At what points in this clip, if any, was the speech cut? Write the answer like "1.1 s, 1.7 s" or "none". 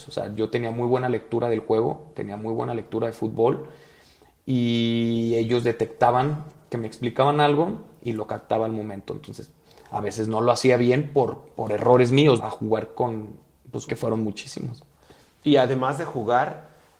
12.4 s, 13.9 s